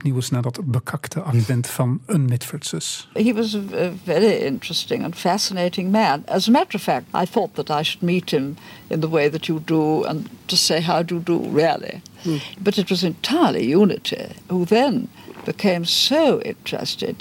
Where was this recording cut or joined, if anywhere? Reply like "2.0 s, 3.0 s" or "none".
7.1 s